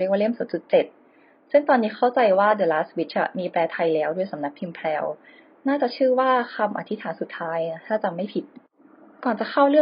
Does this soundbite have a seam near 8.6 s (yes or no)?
no